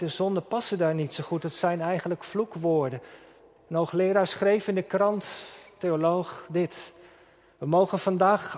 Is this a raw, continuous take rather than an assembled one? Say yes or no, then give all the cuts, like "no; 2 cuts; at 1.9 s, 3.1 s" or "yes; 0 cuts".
yes; 0 cuts